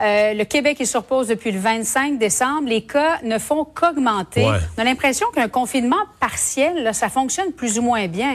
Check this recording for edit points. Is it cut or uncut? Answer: uncut